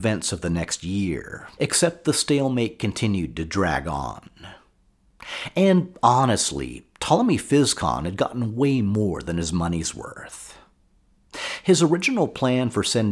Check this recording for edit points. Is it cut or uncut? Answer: cut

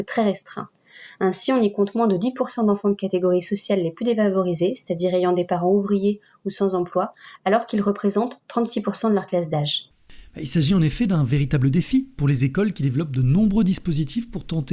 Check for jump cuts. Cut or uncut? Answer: uncut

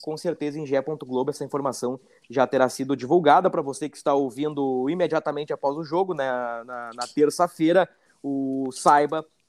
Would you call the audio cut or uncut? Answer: uncut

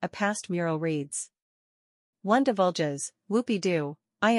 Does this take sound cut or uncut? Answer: uncut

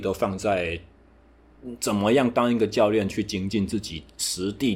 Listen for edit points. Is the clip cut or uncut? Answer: uncut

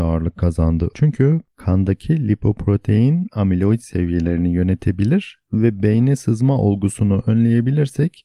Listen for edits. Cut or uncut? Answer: cut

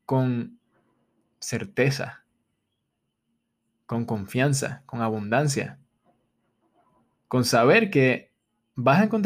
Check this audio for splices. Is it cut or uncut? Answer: uncut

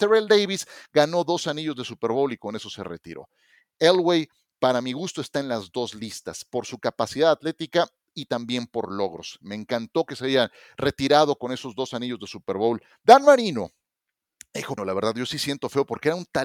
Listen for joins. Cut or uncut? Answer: cut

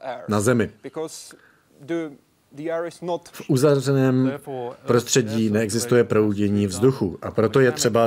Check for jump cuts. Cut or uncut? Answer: cut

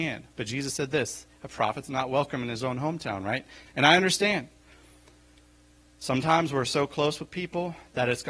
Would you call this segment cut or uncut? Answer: cut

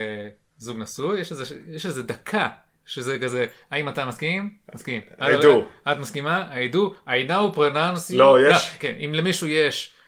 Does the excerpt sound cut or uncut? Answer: uncut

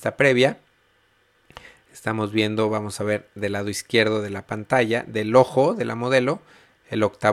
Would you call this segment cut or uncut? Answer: uncut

